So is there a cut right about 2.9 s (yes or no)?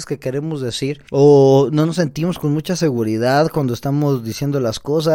no